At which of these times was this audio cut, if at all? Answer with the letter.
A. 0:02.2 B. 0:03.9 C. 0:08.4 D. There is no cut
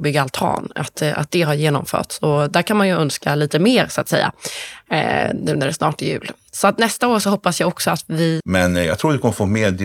C